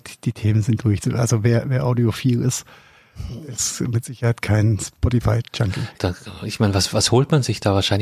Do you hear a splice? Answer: yes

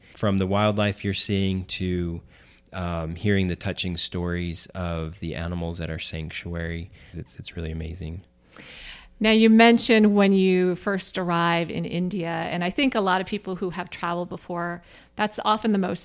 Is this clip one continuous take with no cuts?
no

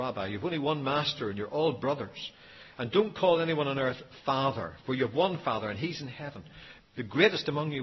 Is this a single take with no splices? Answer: no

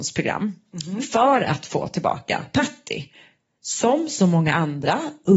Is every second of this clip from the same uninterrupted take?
yes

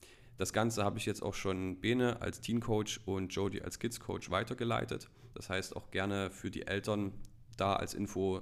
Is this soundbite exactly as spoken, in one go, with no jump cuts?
yes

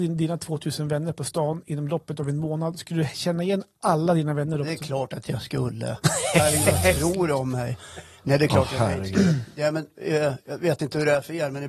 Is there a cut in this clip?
no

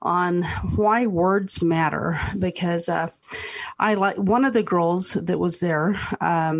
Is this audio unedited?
yes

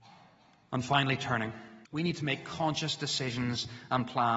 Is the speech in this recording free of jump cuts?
no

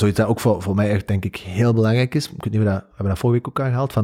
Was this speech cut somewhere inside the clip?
no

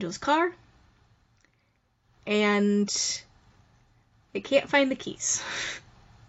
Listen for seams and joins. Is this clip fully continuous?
yes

